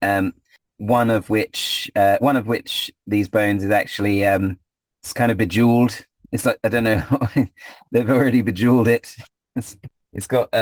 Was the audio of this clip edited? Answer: no; 0 cuts

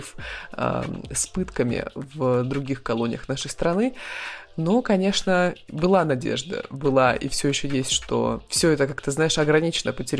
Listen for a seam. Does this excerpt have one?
no; 0 cuts

